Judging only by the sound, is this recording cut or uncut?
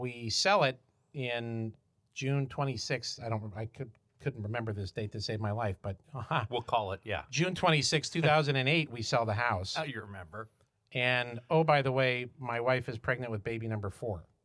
uncut